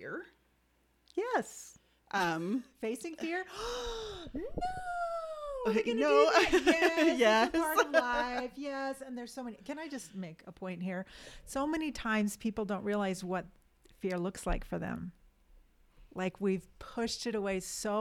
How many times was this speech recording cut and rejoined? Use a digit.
0